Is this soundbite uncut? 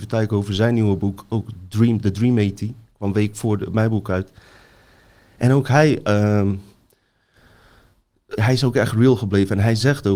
no; 1 cut; at 8.4 s

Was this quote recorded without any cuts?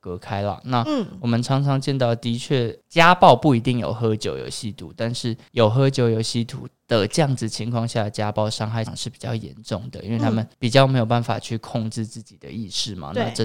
no; 1 cut; at 8.9 s

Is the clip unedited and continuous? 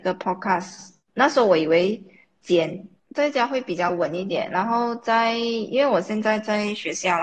no; 1 cut; at 3.0 s

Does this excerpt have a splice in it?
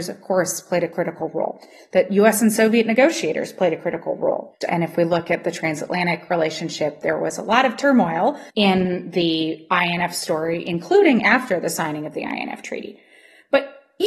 yes; 2 cuts; at 4.6 s, 8.5 s

